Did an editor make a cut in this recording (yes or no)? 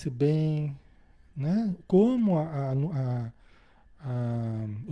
no